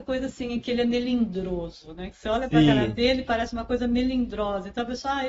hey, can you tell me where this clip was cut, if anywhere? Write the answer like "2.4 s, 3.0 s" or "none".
none

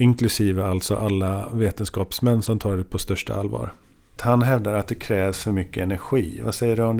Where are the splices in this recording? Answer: 4.2 s

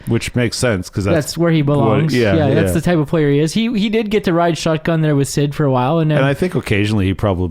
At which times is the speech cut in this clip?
none

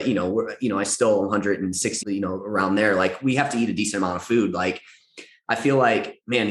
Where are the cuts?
2.0 s

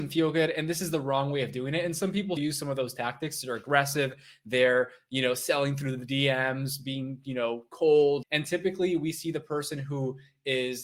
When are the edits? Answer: 2.4 s, 8.2 s

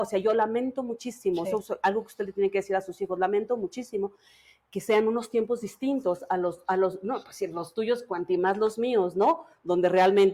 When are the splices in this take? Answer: none

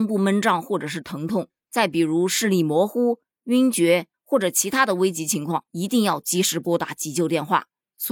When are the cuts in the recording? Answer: 4.1 s

